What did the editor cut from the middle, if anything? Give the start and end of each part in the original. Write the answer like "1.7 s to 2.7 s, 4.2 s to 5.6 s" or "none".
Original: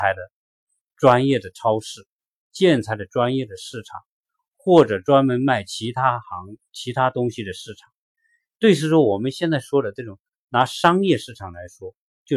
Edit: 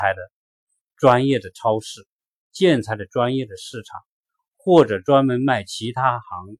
none